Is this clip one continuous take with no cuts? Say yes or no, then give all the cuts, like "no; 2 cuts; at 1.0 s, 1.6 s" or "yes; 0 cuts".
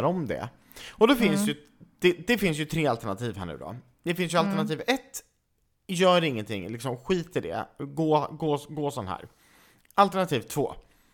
yes; 0 cuts